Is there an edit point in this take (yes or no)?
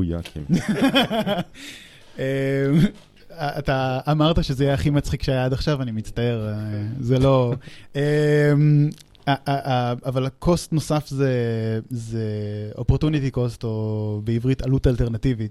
no